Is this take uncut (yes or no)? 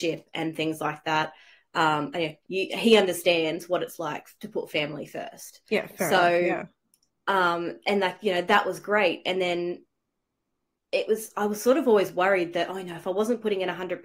no